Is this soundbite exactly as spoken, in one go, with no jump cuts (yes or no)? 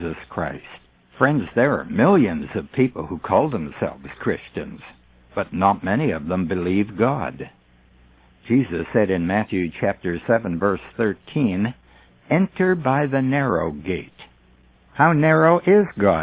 no